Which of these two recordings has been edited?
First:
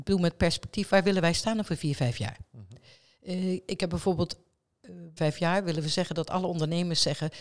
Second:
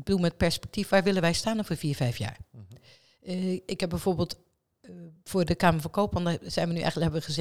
first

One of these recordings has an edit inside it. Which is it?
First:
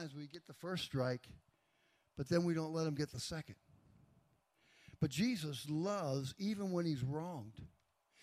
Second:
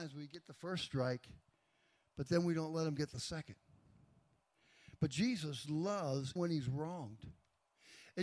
second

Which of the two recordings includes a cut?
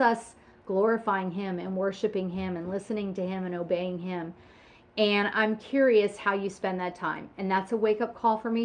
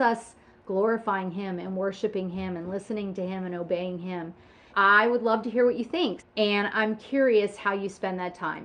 second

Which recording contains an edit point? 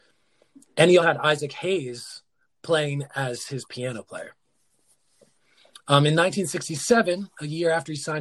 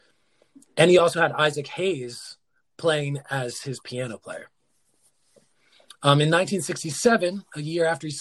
first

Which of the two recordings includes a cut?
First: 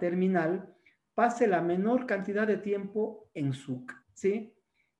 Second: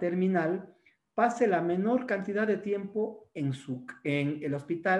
first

